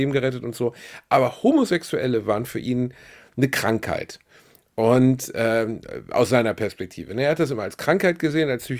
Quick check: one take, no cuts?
yes; 0 cuts

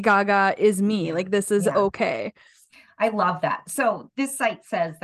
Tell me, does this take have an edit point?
no; 0 cuts

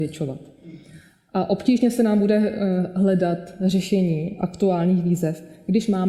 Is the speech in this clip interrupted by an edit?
no; 0 cuts

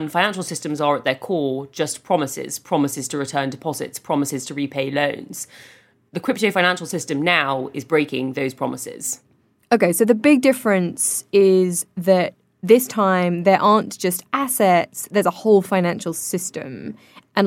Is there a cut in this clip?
no; 0 cuts

